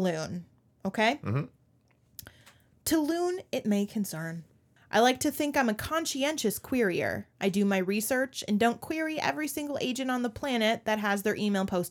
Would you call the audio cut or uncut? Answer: cut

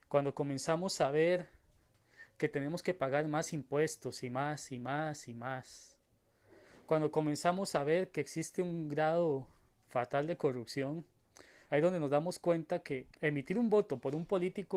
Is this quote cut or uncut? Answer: cut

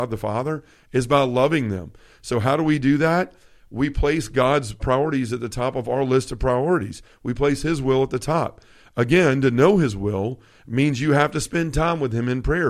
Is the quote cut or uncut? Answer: cut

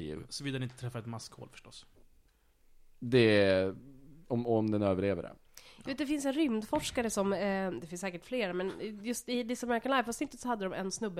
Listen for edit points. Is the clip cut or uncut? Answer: uncut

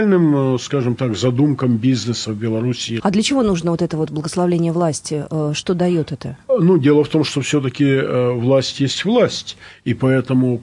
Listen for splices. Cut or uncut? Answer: cut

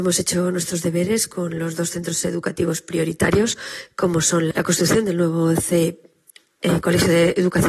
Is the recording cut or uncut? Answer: cut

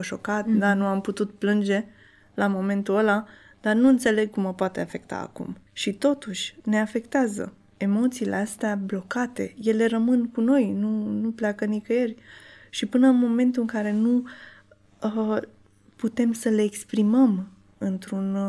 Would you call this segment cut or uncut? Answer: cut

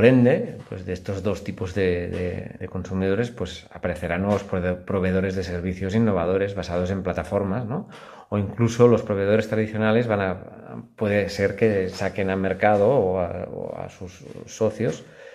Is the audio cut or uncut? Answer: cut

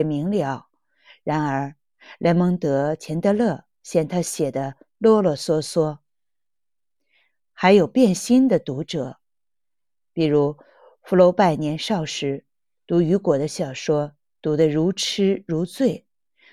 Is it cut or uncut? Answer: uncut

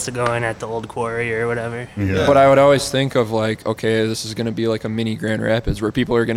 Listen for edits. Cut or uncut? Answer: uncut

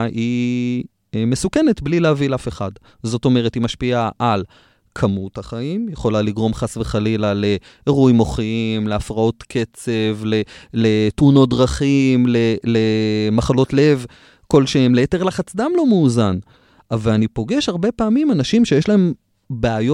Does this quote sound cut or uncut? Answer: uncut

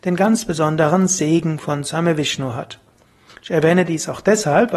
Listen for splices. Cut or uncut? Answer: cut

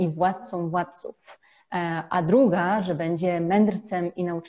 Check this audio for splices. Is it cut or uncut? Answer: uncut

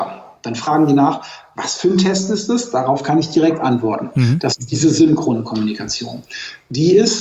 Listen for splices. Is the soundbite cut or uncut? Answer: uncut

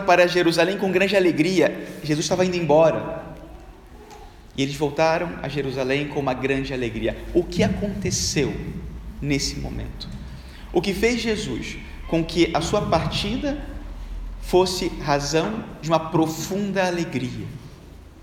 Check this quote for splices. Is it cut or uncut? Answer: uncut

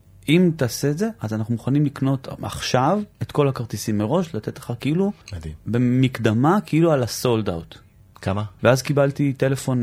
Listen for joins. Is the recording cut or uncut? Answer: cut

